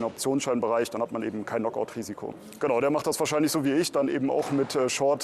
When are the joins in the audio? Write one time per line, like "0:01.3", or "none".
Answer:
0:02.6